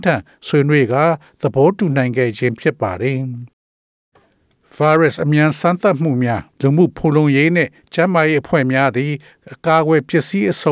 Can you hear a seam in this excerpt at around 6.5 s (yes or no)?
yes